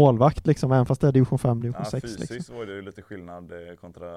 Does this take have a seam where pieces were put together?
no; 0 cuts

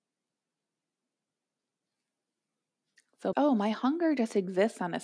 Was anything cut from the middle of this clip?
yes; 1 cut; at 3.3 s

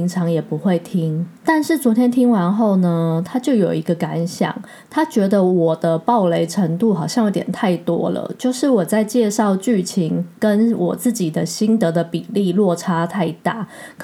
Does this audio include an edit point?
no; 0 cuts

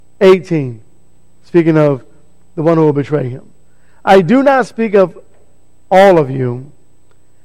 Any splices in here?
no; 0 cuts

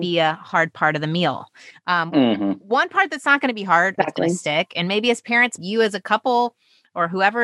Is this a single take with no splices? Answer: no; 2 cuts; at 4.0 s, 5.6 s

